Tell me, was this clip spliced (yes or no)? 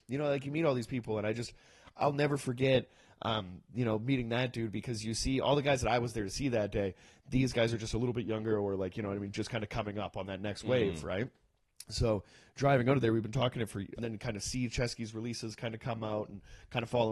yes